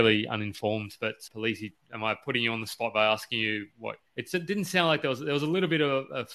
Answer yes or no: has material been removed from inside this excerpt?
yes